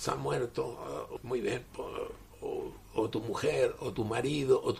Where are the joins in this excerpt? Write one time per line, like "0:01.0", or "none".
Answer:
0:01.2